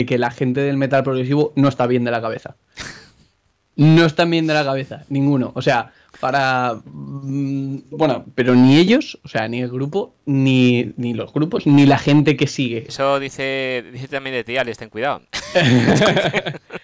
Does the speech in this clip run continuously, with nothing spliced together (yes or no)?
no